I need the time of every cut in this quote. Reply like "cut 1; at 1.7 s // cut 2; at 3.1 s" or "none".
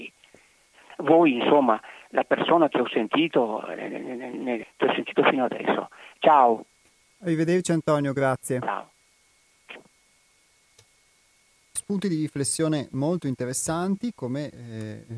cut 1; at 4.6 s